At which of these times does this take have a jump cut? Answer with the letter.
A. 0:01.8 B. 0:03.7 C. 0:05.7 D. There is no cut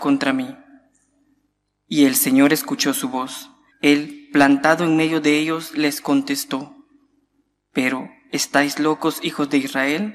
B